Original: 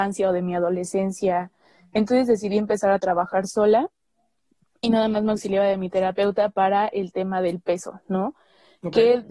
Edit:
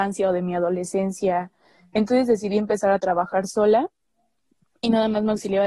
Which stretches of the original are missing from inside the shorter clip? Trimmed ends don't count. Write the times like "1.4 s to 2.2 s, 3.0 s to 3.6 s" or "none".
none